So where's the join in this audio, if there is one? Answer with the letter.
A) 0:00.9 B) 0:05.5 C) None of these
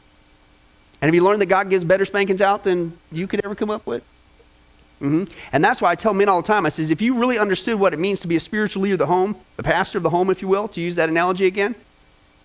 C